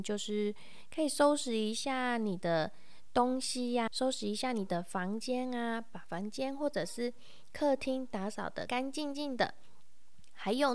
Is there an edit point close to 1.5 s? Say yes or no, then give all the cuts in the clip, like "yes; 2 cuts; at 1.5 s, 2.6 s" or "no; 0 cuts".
no; 2 cuts; at 3.9 s, 8.7 s